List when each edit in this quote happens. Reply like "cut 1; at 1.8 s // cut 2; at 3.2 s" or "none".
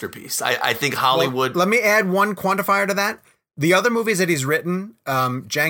none